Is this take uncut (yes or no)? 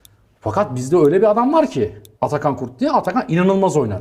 yes